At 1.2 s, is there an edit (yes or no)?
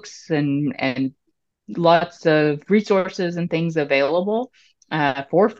no